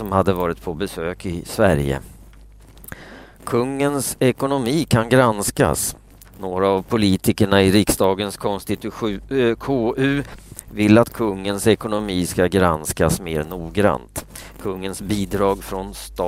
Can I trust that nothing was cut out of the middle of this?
no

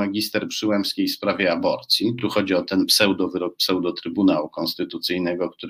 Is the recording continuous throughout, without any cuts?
yes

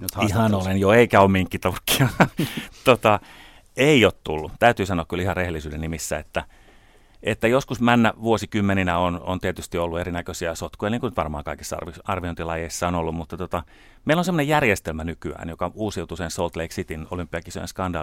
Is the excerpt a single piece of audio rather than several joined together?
yes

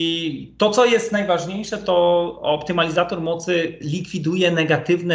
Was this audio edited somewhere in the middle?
no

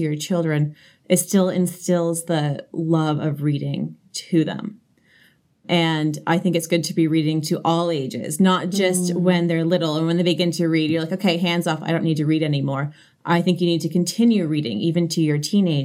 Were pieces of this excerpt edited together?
no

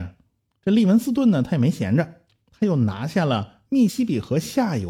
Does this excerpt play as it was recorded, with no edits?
no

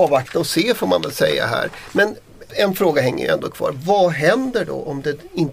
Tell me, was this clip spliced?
yes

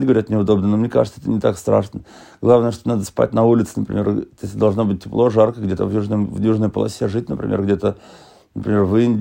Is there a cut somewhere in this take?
no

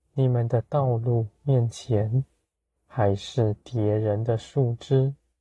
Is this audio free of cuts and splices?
no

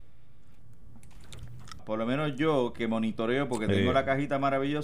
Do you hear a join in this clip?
yes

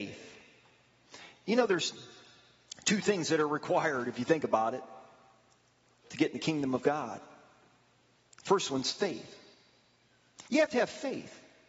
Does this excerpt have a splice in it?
no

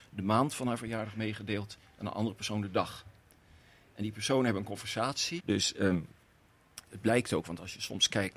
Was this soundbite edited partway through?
yes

